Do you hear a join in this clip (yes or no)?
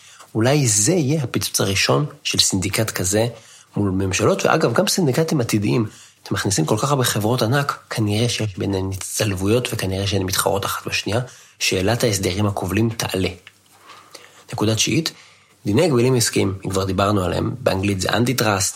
no